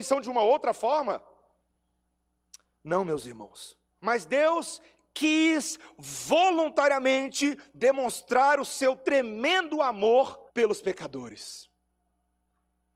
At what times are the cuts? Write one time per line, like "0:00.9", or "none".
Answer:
0:04.0
0:10.5